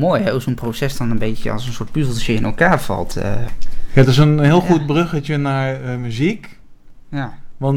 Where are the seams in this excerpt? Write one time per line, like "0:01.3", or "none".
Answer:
none